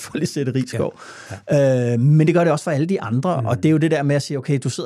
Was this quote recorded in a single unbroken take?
yes; 0 cuts

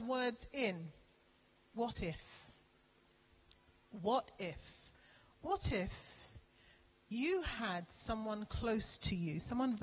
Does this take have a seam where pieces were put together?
yes; 1 cut; at 1.7 s

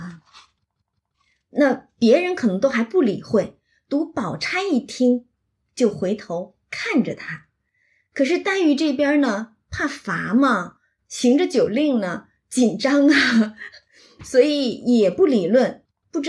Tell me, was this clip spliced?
no; 0 cuts

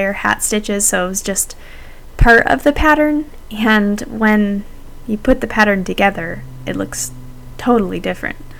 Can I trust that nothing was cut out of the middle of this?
yes; 0 cuts

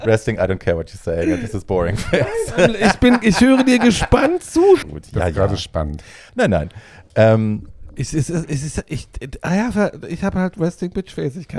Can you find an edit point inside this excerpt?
yes; 2 cuts; at 4.8 s, 6.3 s

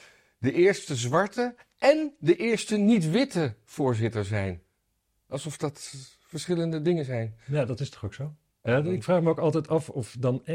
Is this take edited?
yes; 1 cut; at 8.6 s

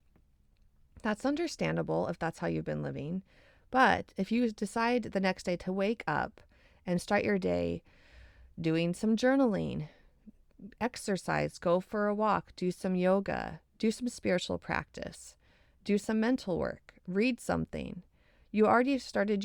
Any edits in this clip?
no; 0 cuts

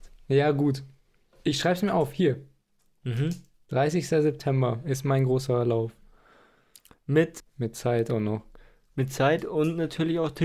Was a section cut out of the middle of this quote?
yes; 1 cut; at 7.4 s

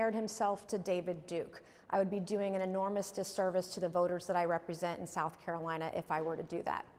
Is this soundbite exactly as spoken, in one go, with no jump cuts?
yes; 0 cuts

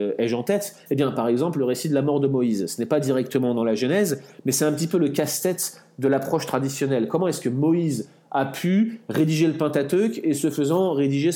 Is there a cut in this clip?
no; 0 cuts

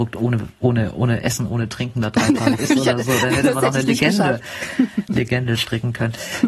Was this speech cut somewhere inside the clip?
yes; 1 cut; at 2.6 s

